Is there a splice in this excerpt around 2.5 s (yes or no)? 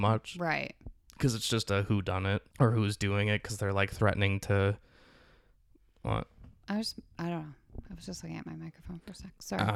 yes